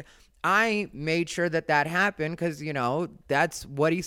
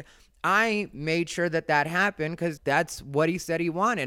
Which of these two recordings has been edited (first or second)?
second